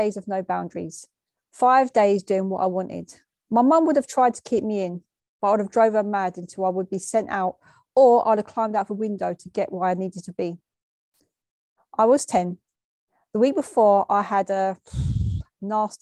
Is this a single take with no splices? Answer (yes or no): no